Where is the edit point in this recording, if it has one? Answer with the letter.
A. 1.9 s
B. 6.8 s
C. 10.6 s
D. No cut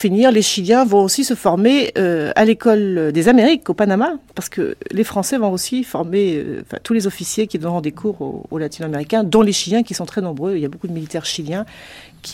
D